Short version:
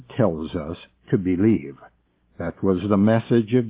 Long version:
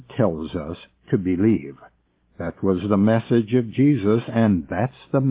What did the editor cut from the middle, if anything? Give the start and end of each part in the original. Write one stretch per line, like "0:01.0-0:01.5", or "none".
none